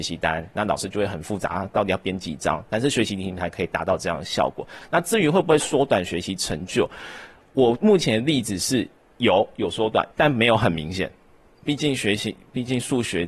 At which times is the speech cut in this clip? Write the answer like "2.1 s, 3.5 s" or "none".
10.1 s